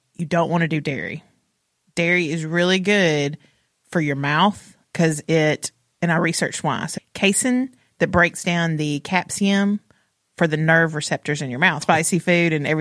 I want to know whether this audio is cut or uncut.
cut